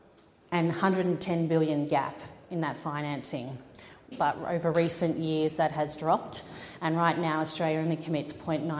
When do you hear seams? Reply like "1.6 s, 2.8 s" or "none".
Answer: 4.1 s, 6.8 s